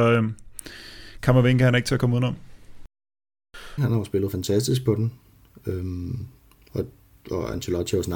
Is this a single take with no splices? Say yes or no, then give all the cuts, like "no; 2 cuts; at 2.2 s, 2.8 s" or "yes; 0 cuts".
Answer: no; 1 cut; at 3.8 s